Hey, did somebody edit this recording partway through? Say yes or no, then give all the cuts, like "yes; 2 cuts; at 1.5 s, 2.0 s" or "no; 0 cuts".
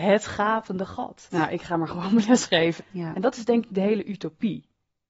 yes; 2 cuts; at 1.3 s, 2.8 s